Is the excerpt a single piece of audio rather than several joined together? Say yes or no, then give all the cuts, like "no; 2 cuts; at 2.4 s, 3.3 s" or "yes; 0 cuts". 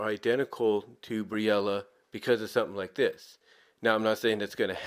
yes; 0 cuts